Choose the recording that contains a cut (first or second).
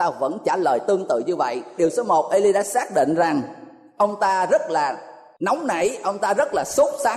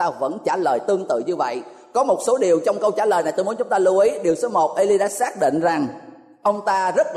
first